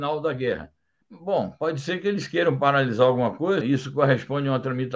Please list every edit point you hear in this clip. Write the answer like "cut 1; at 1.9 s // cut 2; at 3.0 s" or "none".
cut 1; at 1.0 s // cut 2; at 3.6 s